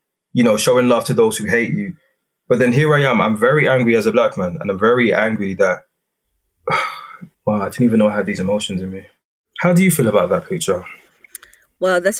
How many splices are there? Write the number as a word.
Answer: one